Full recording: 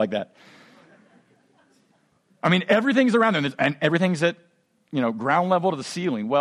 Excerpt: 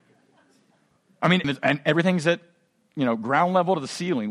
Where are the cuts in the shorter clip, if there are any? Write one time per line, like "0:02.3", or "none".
0:01.4